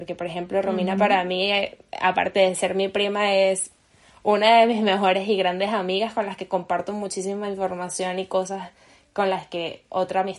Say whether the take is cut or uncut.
uncut